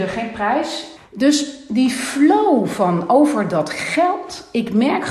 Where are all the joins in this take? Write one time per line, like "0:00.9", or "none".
0:01.0

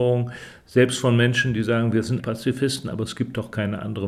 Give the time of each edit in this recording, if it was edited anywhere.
0:02.2

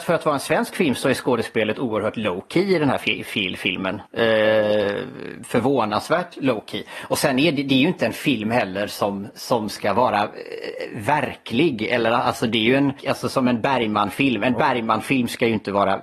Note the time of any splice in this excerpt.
0:13.0

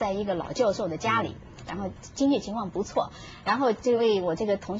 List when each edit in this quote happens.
0:01.7

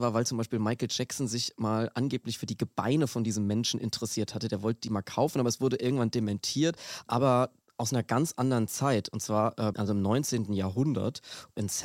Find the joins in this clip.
0:07.0
0:09.7

